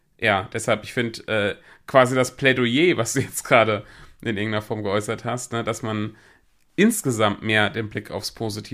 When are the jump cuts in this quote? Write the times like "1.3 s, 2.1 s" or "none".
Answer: none